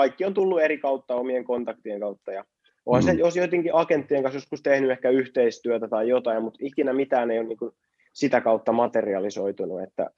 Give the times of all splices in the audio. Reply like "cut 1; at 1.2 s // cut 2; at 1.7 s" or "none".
none